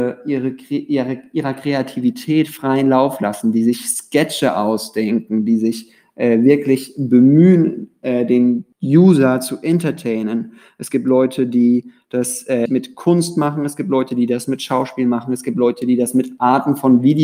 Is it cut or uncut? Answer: cut